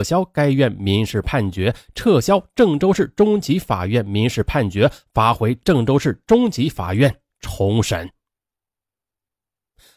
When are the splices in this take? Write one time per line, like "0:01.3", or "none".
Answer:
none